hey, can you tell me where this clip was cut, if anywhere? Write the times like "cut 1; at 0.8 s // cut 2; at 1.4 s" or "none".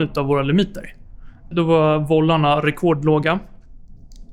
cut 1; at 1.5 s